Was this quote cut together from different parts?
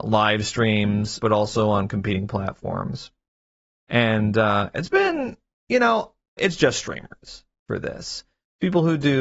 yes; 2 cuts; at 1.2 s, 6.4 s

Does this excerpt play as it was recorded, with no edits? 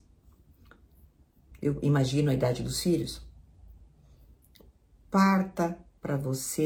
no; 1 cut; at 1.5 s

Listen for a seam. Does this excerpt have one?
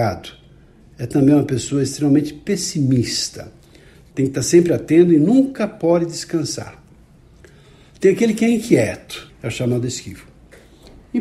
yes; 1 cut; at 9.3 s

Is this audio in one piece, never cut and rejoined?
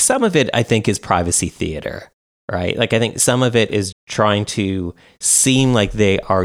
no; 1 cut; at 3.9 s

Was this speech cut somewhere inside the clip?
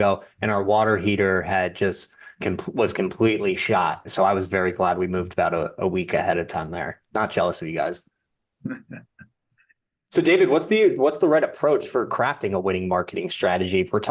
no; 0 cuts

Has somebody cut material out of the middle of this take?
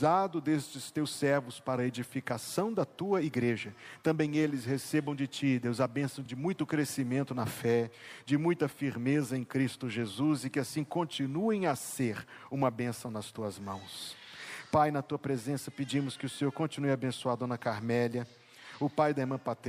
no; 0 cuts

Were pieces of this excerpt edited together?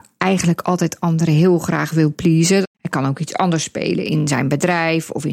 yes; 1 cut; at 2.6 s

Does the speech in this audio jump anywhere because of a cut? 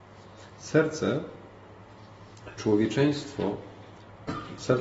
no; 0 cuts

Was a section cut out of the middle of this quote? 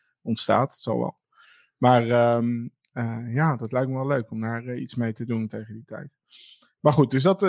no; 0 cuts

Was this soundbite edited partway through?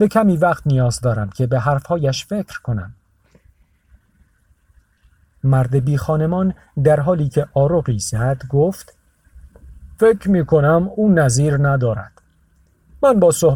no; 0 cuts

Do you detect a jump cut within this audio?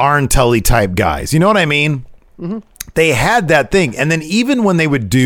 no; 0 cuts

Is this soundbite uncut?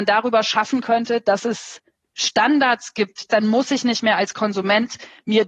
no; 1 cut; at 3.3 s

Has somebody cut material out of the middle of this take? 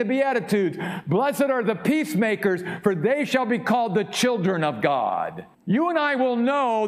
yes; 1 cut; at 5.5 s

